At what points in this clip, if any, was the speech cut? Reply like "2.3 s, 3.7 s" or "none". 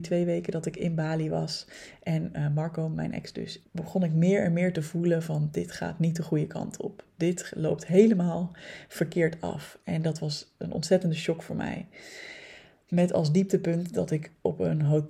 3.6 s